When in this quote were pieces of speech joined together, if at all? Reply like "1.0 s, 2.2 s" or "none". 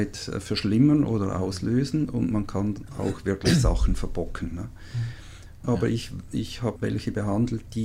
5.6 s, 6.8 s